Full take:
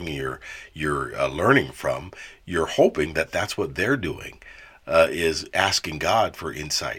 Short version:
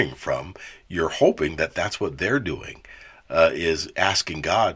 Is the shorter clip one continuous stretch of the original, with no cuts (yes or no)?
yes